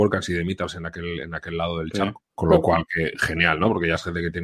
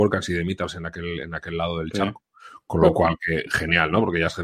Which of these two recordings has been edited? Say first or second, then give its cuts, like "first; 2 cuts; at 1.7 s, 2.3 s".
first; 1 cut; at 2.3 s